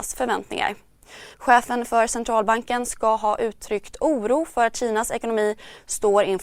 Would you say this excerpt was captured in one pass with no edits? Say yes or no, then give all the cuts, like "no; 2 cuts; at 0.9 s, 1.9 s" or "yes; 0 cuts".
no; 1 cut; at 1.3 s